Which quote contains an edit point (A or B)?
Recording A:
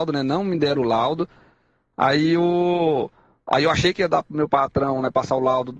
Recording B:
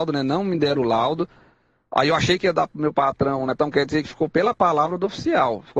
B